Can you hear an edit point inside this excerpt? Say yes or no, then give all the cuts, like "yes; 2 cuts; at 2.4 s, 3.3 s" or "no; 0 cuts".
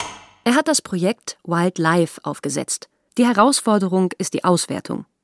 yes; 1 cut; at 3.1 s